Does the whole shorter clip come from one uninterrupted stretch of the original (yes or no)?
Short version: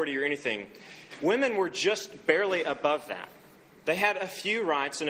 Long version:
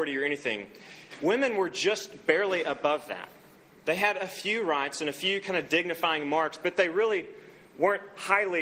yes